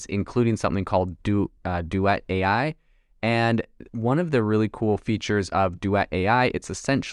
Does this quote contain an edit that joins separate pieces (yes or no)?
no